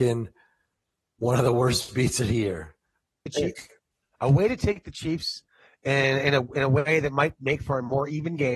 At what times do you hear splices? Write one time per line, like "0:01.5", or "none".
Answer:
0:03.3